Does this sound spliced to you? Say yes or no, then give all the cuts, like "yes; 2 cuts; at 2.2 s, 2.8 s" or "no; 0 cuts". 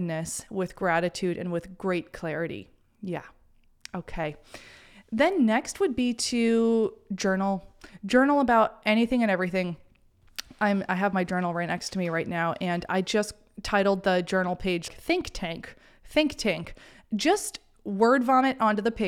yes; 1 cut; at 14.9 s